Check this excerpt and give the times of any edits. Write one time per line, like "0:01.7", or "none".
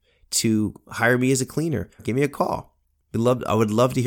0:02.0